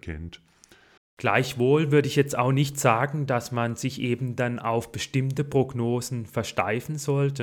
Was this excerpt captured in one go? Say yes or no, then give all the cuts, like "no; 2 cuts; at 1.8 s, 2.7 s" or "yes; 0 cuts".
no; 1 cut; at 1.0 s